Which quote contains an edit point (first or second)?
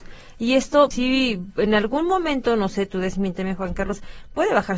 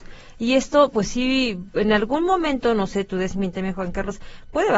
first